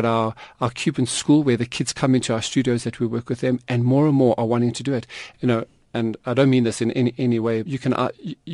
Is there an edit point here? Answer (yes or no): yes